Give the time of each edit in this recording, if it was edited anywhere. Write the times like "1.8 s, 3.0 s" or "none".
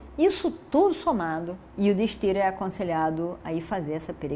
1.7 s